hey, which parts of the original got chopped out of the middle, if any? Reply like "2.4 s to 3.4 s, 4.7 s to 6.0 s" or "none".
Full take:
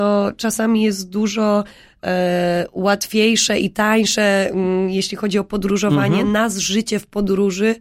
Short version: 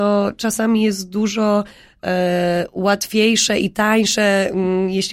none